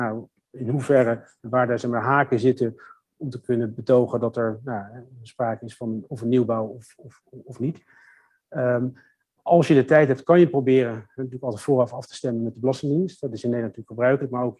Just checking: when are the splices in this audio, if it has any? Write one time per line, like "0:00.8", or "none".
none